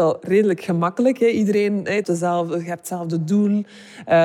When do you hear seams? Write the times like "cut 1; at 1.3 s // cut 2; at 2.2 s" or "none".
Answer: cut 1; at 2.0 s